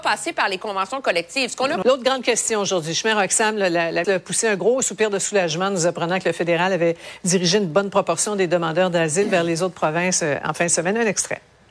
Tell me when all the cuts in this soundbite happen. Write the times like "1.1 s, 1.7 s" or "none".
1.8 s, 4.0 s